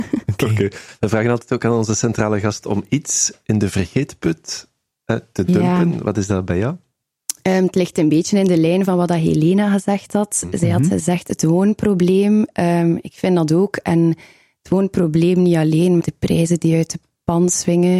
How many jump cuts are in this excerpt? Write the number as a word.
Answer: one